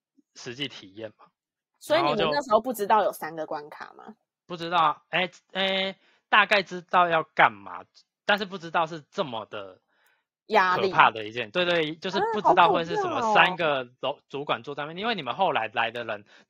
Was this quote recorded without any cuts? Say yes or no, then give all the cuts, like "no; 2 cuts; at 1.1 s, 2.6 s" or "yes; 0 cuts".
yes; 0 cuts